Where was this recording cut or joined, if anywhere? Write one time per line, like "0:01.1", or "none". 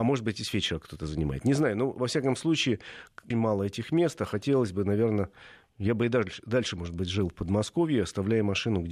0:03.3